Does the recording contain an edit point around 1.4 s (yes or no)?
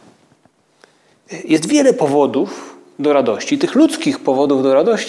no